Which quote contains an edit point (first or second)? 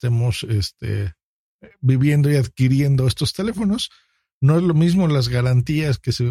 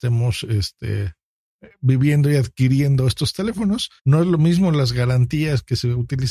second